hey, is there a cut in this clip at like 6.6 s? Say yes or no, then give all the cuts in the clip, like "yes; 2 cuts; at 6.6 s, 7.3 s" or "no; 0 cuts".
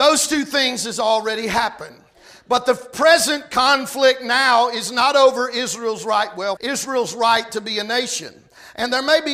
yes; 1 cut; at 6.6 s